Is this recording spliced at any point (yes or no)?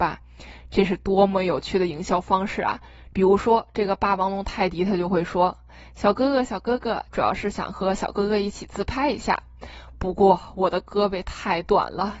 yes